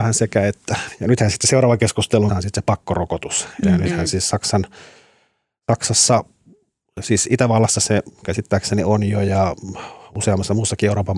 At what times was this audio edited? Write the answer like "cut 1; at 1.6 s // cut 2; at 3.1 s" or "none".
cut 1; at 2.3 s